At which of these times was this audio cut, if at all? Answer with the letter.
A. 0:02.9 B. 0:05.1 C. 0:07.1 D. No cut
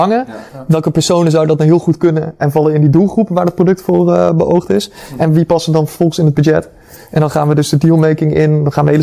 D